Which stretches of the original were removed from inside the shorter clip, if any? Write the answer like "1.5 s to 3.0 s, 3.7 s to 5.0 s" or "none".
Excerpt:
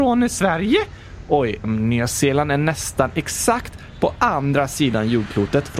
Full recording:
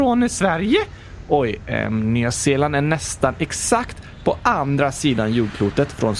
1.6 s to 1.9 s